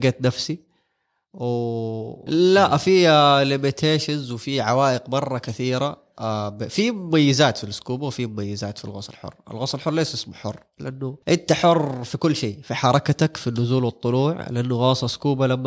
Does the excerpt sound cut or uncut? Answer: cut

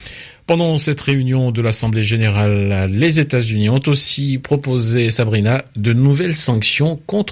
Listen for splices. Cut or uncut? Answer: uncut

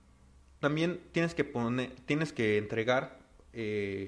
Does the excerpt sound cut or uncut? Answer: uncut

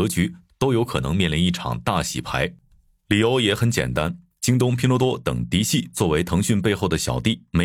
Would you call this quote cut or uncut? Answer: uncut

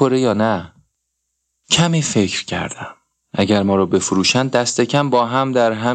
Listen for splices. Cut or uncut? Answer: uncut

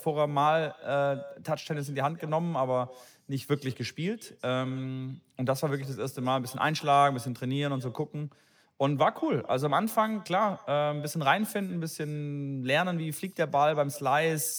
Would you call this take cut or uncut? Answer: uncut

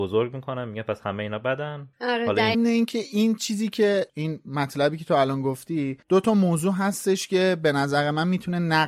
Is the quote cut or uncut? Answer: cut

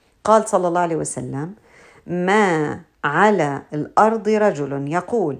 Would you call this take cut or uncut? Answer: uncut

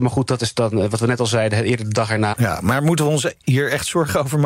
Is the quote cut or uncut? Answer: cut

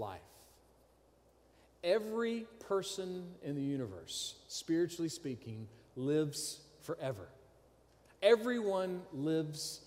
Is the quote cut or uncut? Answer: uncut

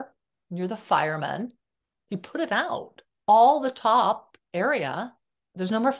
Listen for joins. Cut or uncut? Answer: cut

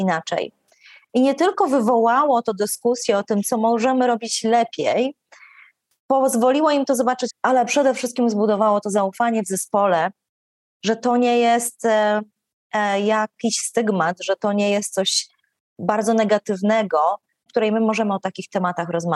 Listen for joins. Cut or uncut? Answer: cut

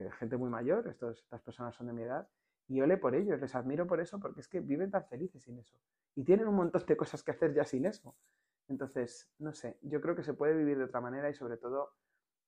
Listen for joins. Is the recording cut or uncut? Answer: uncut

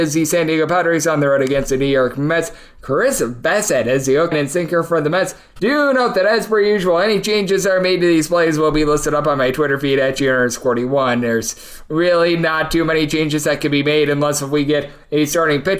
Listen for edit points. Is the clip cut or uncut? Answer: cut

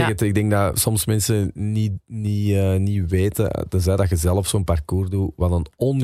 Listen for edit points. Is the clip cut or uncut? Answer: uncut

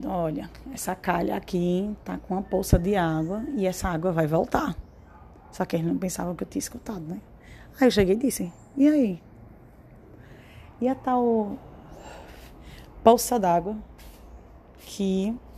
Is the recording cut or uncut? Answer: uncut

